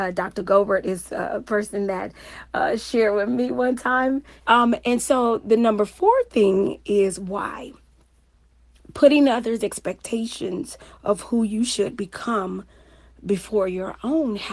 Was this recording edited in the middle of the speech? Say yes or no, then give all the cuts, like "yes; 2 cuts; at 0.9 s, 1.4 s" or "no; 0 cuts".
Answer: yes; 1 cut; at 4.4 s